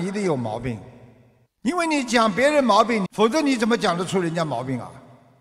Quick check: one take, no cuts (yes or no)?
no